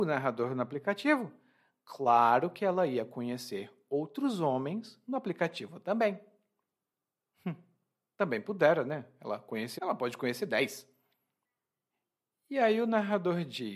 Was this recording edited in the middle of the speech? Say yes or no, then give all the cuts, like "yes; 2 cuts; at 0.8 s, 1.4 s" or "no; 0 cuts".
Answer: yes; 1 cut; at 9.8 s